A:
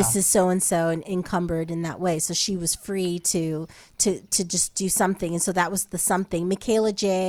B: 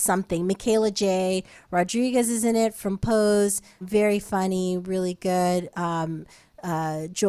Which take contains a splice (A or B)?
B